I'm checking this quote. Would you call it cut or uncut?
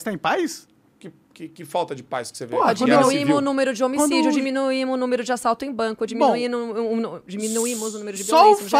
uncut